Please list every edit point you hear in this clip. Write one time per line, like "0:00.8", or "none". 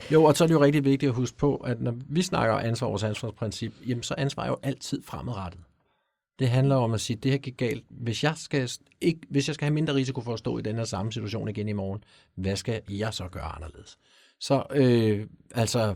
none